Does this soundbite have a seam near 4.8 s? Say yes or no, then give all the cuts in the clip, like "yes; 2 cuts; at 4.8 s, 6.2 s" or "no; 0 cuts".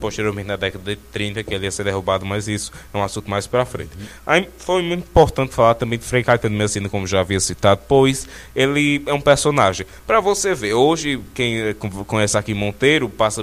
no; 0 cuts